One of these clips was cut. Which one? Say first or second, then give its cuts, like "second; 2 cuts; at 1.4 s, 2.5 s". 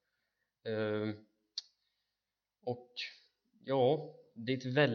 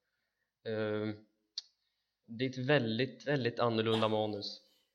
second; 1 cut; at 2.2 s